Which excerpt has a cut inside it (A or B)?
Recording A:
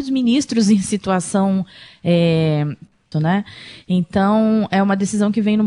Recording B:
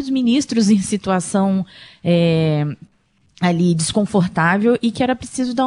A